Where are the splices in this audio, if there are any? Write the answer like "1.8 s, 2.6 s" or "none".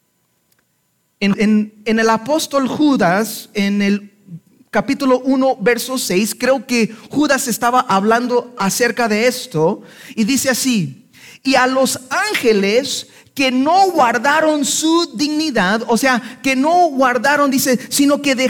1.3 s